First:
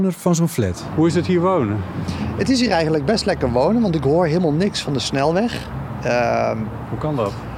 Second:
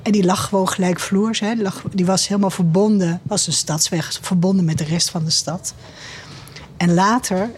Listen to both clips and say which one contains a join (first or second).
first